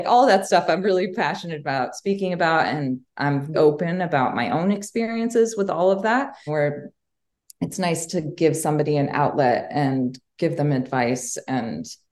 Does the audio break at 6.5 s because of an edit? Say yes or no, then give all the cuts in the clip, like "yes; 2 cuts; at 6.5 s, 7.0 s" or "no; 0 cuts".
yes; 2 cuts; at 3.5 s, 6.5 s